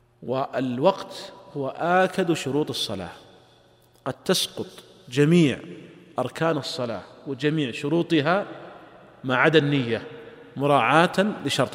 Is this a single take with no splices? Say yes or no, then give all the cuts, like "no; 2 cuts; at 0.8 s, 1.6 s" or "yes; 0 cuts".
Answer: yes; 0 cuts